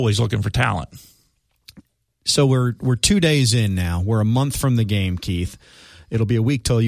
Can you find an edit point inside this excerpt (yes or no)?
no